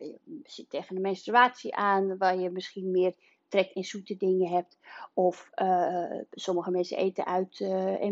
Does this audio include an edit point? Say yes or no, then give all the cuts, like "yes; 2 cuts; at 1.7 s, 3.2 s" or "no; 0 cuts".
no; 0 cuts